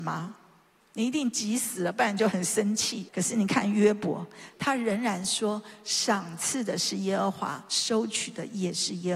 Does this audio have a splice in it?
yes; 2 cuts; at 3.1 s, 4.5 s

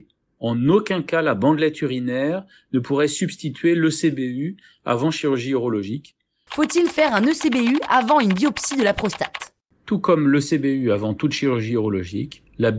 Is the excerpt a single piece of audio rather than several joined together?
no; 1 cut; at 6.5 s

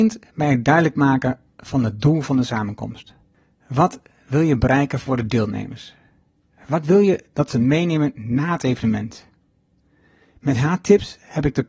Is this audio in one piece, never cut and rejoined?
yes; 0 cuts

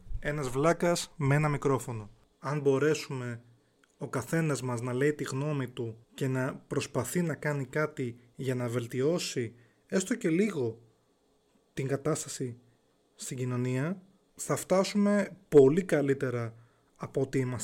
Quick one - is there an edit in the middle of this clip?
yes; 2 cuts; at 2.3 s, 6.0 s

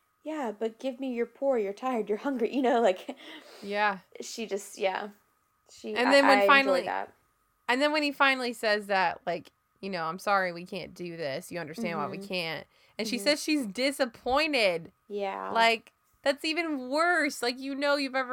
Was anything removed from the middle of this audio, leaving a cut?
no; 0 cuts

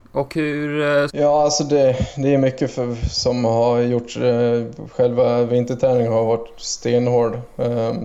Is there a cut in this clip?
yes; 1 cut; at 1.1 s

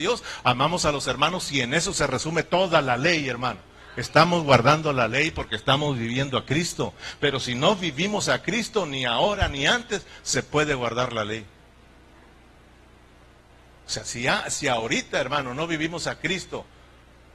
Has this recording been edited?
no; 0 cuts

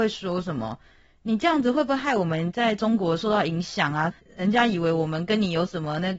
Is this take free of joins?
yes; 0 cuts

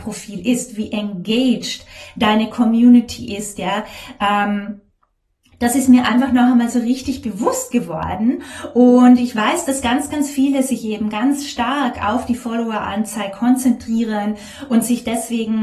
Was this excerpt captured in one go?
yes; 0 cuts

